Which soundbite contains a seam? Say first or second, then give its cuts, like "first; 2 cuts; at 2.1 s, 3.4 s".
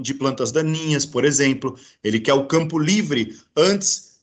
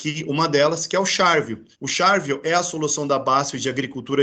second; 1 cut; at 1.7 s